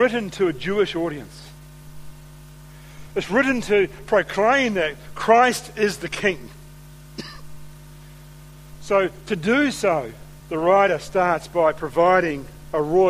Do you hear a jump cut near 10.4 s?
yes; 1 cut; at 10.4 s

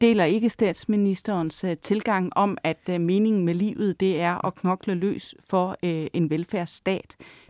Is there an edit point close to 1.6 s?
no; 0 cuts

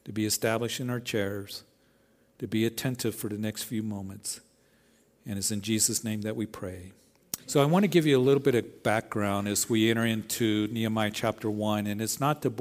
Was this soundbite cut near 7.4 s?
yes; 1 cut; at 7.4 s

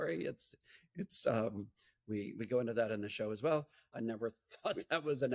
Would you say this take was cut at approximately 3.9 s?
yes; 1 cut; at 3.9 s

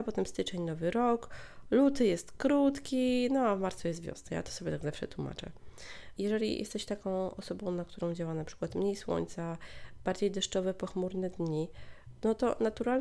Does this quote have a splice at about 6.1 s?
yes; 1 cut; at 6.1 s

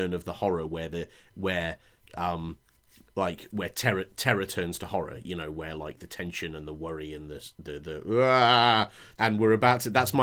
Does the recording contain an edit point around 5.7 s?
no; 1 cut; at 9.1 s

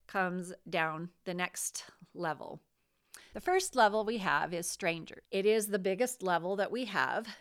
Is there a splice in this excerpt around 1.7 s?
no; 2 cuts; at 3.3 s, 5.2 s

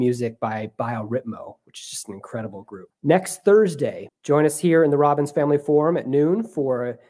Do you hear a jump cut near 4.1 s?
yes; 2 cuts; at 2.9 s, 4.1 s

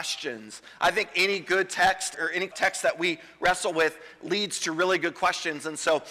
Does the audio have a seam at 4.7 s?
no; 0 cuts

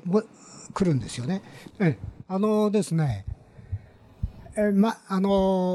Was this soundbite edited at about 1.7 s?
yes; 1 cut; at 1.7 s

